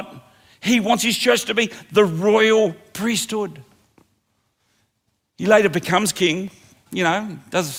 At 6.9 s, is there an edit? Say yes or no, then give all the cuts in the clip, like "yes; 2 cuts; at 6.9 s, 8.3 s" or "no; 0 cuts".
yes; 1 cut; at 6.9 s